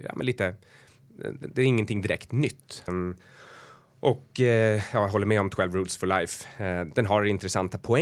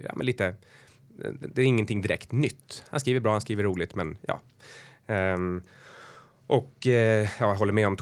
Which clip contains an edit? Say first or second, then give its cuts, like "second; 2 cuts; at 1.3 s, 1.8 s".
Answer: first; 1 cut; at 2.9 s